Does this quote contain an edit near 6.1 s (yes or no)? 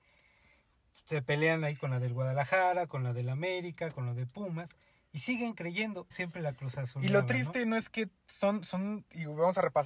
yes